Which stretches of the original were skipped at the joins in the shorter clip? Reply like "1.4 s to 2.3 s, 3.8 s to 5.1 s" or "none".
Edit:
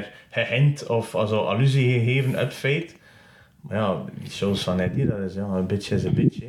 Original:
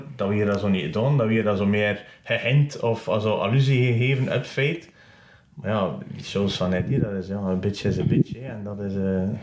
none